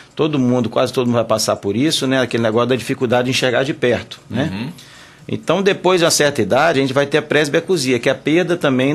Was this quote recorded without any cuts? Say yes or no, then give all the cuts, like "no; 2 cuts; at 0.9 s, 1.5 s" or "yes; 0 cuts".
yes; 0 cuts